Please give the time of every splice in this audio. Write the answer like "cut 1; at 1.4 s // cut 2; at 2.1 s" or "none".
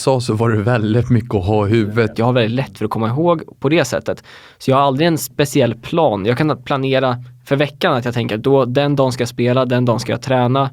cut 1; at 2.1 s